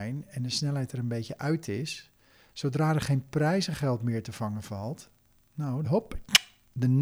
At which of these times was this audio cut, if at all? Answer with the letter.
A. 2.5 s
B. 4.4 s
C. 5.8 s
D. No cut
C